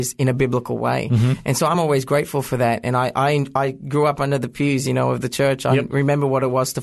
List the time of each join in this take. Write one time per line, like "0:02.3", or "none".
none